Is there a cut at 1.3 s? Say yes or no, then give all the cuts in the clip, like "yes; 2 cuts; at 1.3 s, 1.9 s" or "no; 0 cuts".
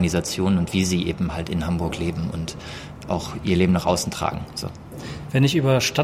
no; 0 cuts